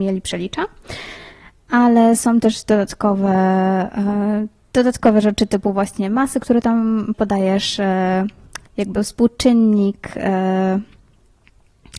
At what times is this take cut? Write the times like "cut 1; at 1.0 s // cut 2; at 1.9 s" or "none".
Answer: cut 1; at 7.1 s // cut 2; at 8.7 s